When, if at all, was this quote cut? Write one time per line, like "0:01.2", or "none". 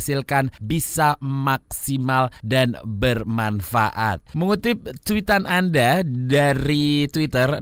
0:04.3